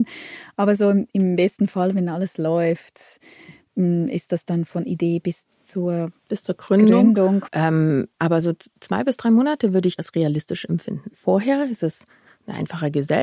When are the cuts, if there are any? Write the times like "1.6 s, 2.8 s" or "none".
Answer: 7.5 s, 10.0 s, 11.1 s